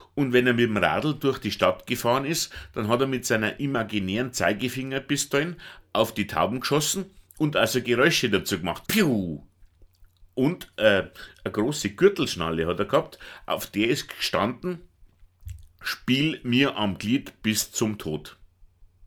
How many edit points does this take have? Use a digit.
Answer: 1